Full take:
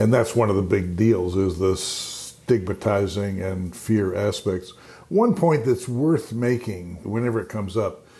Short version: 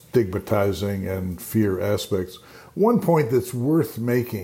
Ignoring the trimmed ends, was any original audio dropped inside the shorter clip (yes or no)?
no